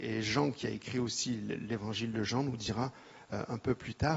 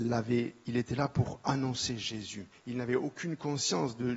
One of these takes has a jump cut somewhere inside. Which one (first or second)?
second